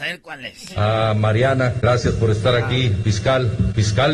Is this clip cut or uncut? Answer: uncut